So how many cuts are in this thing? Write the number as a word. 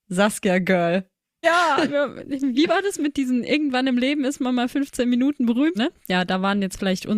two